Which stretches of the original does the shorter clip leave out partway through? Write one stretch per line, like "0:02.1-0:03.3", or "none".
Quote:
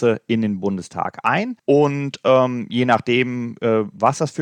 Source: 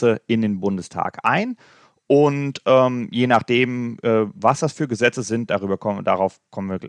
0:01.6-0:02.0